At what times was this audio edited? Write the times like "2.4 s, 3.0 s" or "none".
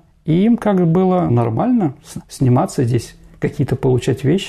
1.3 s